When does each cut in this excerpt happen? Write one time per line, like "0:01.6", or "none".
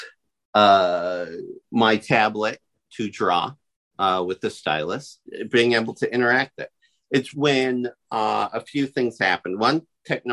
0:05.3
0:07.3